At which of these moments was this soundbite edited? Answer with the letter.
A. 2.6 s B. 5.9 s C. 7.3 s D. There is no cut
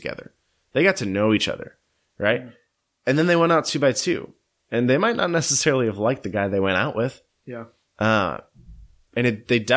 D